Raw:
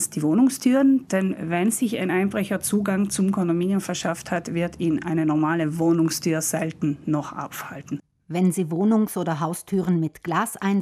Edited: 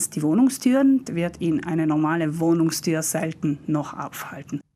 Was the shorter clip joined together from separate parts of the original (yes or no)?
yes